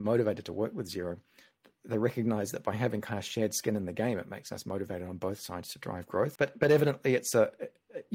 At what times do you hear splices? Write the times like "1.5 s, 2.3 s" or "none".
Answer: 6.4 s